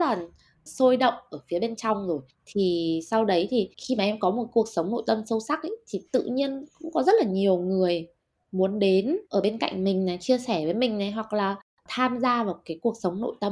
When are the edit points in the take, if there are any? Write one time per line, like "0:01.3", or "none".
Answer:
0:03.7
0:09.3

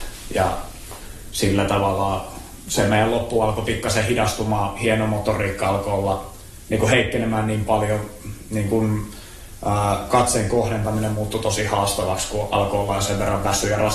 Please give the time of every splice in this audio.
none

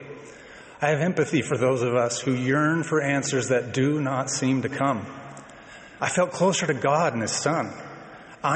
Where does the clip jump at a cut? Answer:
0:06.0

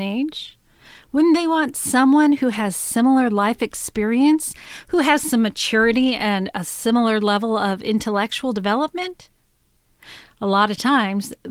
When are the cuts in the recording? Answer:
none

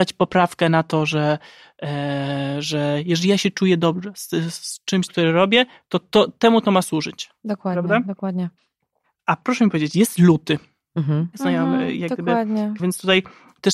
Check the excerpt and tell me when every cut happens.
0:05.1
0:11.3
0:12.8

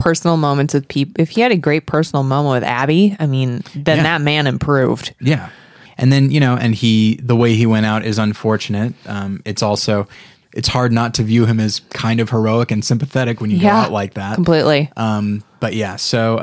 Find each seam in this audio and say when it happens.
0:05.9

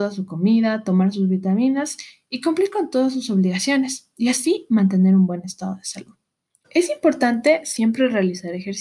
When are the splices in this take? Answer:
0:06.6

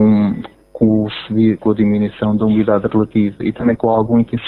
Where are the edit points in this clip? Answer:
0:01.6

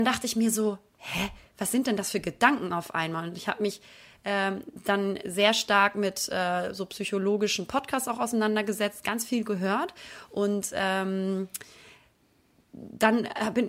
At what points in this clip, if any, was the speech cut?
none

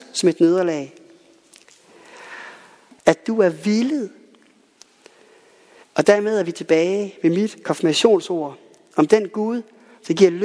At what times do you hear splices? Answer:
0:03.0
0:05.8

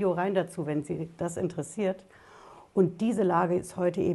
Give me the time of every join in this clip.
none

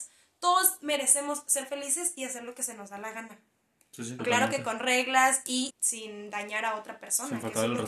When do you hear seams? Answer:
0:04.2
0:05.7

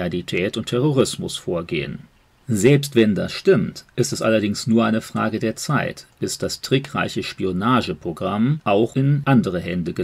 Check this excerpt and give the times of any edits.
none

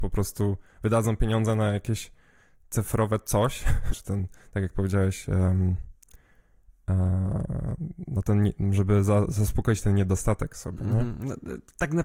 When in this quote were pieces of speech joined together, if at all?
0:03.9

